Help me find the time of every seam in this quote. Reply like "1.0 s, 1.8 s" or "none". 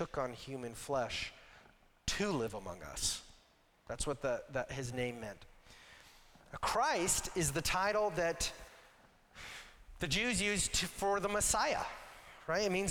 3.7 s